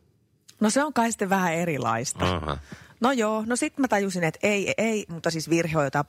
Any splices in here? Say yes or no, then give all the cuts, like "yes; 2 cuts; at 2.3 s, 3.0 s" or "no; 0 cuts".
yes; 1 cut; at 5.1 s